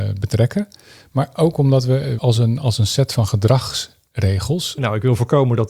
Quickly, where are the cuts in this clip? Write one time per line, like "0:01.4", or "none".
0:02.2
0:04.8